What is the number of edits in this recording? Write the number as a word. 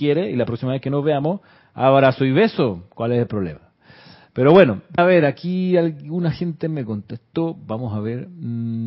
one